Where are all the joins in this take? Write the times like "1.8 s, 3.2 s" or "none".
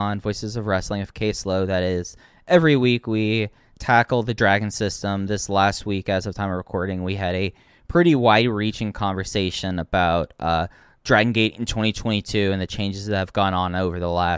none